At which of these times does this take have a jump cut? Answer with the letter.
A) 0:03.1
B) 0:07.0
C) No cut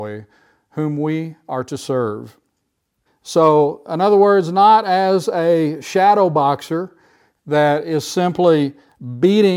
A